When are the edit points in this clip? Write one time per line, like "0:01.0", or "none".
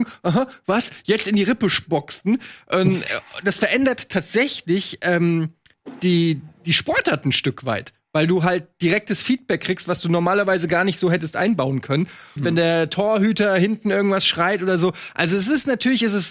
0:12.4